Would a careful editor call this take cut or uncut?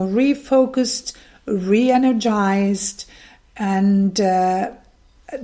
uncut